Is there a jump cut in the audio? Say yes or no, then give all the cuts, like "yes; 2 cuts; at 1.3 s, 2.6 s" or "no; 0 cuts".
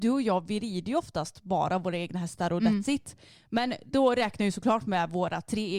no; 0 cuts